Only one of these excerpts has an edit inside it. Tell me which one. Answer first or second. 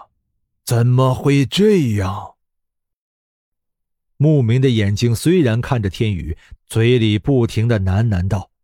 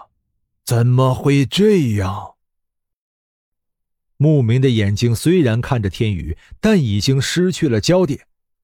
first